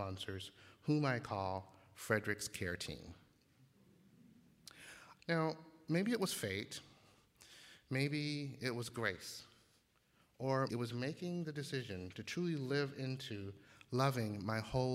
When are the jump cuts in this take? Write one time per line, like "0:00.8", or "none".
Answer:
0:05.2
0:10.7